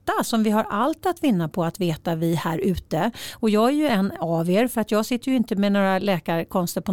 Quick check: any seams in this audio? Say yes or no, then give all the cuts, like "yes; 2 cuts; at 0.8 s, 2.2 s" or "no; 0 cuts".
no; 0 cuts